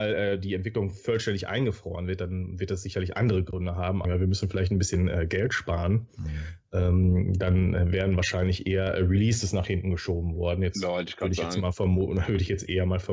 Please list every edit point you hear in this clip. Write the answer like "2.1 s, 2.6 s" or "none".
4.0 s